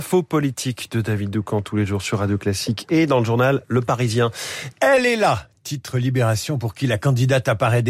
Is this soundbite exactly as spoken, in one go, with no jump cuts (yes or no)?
no